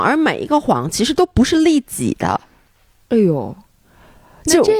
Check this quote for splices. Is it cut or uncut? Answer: uncut